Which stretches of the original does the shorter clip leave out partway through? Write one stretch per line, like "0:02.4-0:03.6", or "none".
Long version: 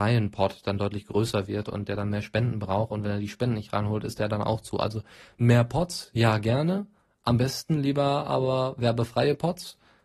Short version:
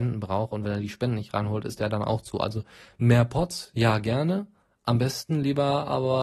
none